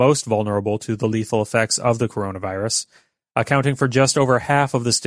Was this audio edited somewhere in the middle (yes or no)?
no